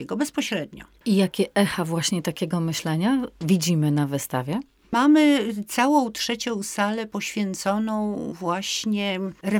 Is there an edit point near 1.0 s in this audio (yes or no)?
yes